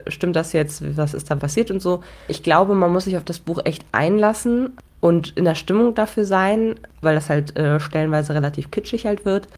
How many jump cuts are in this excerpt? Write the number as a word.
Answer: two